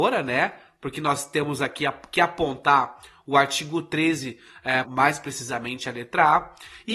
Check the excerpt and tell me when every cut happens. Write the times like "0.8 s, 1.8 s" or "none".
4.8 s